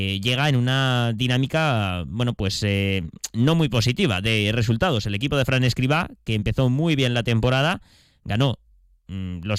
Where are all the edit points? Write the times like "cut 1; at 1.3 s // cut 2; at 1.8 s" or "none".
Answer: none